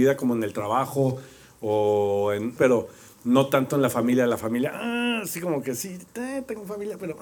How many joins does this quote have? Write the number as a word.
one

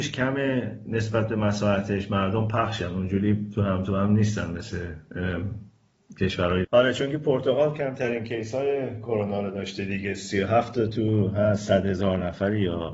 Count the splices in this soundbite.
one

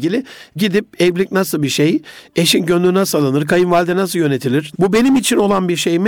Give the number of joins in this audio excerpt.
one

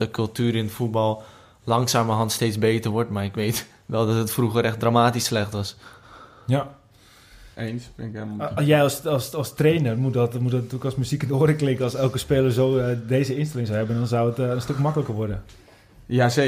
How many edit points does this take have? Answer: one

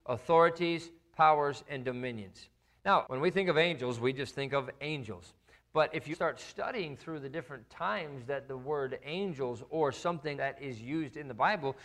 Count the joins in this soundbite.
three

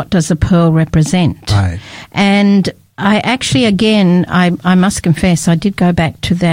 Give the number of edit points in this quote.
zero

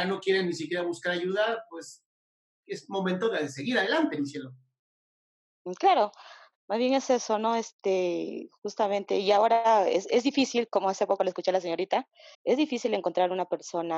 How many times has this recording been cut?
one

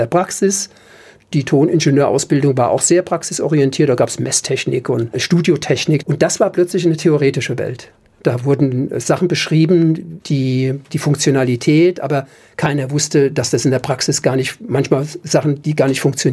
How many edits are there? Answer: one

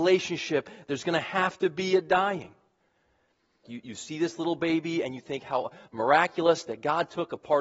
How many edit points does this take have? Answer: one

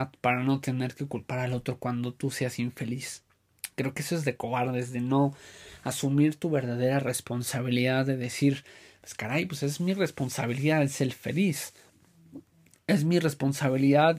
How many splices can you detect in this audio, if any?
zero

